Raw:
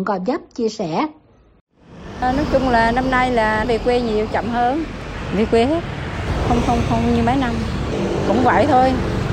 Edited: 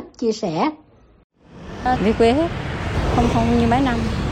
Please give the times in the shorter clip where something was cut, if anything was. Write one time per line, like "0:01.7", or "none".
0:02.0
0:03.3